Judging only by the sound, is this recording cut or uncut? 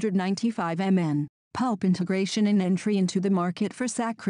cut